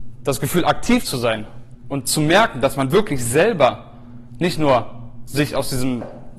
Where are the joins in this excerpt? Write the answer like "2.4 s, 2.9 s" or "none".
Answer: none